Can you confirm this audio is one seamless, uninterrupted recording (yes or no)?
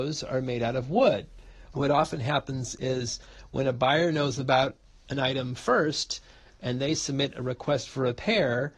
no